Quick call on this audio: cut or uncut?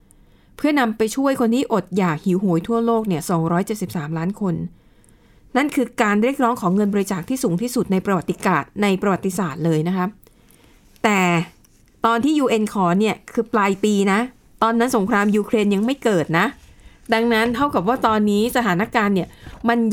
uncut